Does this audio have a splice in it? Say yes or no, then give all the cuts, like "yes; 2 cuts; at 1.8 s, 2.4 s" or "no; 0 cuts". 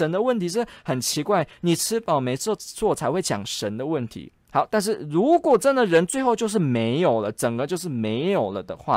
no; 0 cuts